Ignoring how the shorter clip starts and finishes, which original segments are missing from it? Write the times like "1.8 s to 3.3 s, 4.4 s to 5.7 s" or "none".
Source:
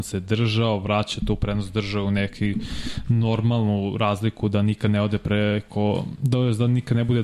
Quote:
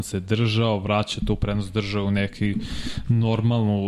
none